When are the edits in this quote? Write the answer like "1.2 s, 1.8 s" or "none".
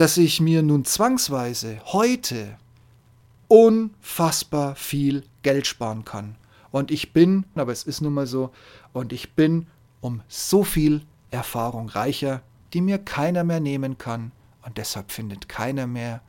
7.6 s